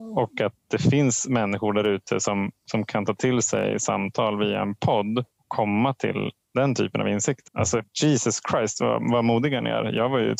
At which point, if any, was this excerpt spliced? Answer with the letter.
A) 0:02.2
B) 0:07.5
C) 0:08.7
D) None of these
B